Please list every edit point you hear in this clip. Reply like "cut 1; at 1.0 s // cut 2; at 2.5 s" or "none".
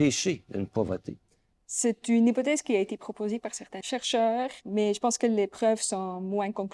cut 1; at 1.5 s

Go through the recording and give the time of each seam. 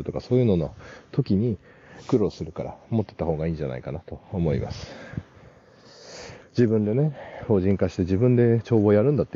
cut 1; at 6.4 s

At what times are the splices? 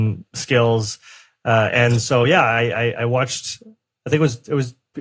none

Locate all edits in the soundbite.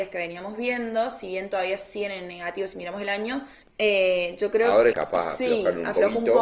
cut 1; at 3.6 s // cut 2; at 4.9 s

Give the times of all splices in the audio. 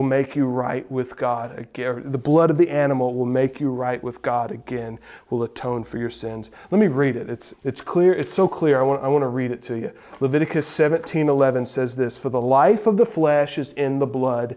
cut 1; at 7.5 s

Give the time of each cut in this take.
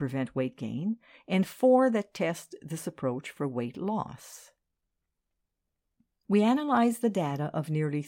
none

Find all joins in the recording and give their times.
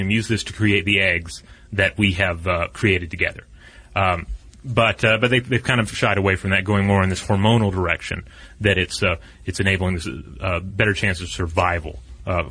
none

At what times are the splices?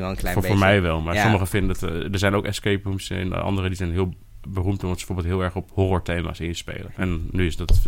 cut 1; at 4.4 s // cut 2; at 6.9 s

